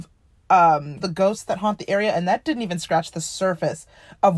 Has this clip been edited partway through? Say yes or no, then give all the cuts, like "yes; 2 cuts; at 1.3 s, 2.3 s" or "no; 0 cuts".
yes; 1 cut; at 1.0 s